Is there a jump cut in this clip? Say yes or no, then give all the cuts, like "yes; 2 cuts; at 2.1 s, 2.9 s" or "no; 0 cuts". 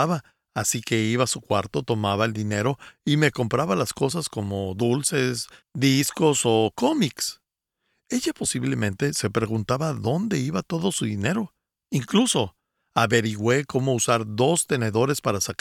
no; 0 cuts